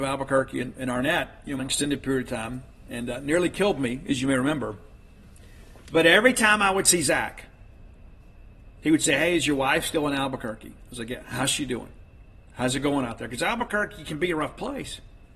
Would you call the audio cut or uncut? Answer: cut